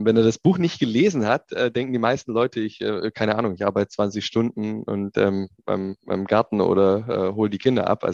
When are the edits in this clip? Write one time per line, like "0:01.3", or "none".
0:05.6